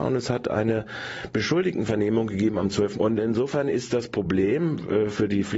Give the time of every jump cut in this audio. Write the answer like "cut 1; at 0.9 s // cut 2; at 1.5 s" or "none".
cut 1; at 2.9 s